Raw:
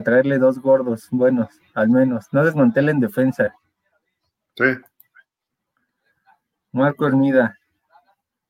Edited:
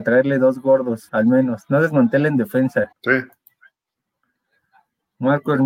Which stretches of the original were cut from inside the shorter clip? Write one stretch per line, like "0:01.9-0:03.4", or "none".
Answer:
0:01.1-0:01.7
0:03.5-0:04.5